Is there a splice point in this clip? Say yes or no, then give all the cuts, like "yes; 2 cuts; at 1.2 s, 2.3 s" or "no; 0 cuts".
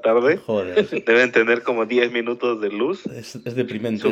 no; 0 cuts